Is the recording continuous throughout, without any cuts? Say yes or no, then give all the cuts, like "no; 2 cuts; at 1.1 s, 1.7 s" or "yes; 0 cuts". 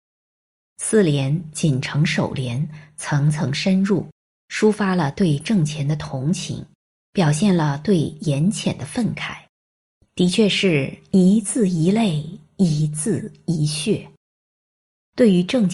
yes; 0 cuts